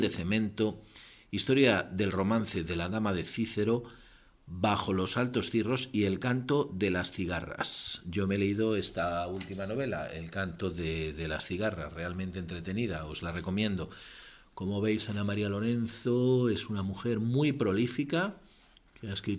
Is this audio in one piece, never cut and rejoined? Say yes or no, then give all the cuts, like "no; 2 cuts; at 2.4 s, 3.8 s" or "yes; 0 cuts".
yes; 0 cuts